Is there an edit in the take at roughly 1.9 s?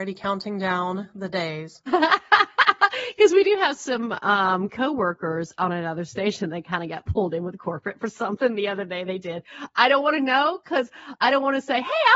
yes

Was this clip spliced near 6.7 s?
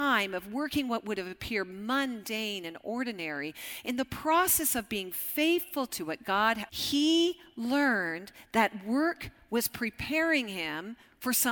yes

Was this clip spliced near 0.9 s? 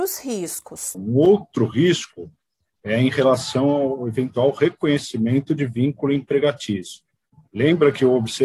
yes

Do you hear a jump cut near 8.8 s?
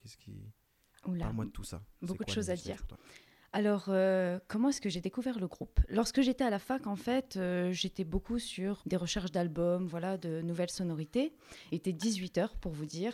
yes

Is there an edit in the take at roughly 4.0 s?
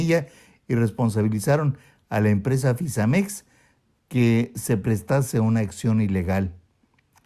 yes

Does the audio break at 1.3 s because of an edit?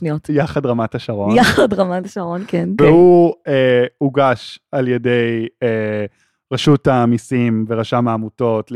no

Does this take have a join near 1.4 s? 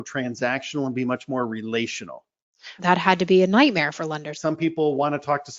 no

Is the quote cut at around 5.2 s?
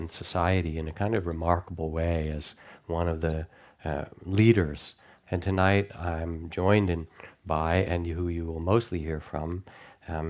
yes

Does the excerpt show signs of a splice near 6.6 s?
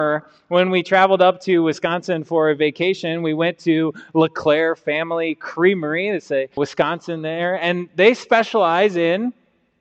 yes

